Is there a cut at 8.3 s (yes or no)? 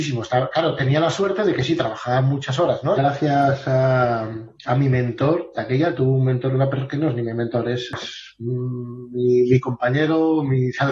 no